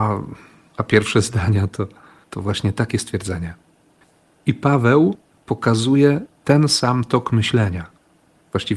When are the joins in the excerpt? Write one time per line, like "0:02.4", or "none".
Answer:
none

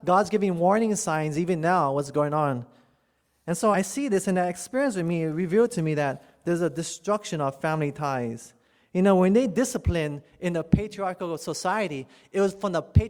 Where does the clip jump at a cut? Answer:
0:03.7

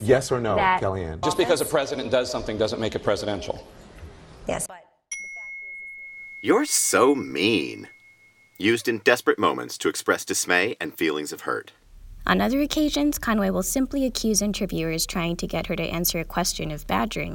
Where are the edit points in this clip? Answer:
0:01.2
0:04.7

